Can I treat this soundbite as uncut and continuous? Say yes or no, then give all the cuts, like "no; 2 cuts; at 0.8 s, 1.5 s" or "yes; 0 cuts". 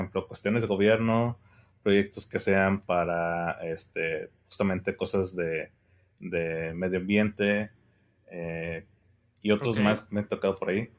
yes; 0 cuts